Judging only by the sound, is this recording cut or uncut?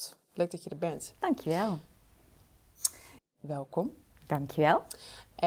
cut